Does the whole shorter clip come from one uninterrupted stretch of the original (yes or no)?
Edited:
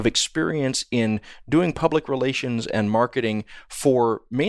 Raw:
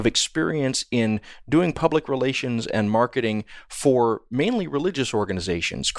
yes